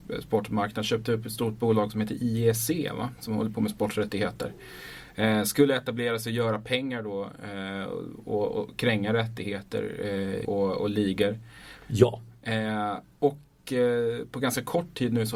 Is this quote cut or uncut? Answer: cut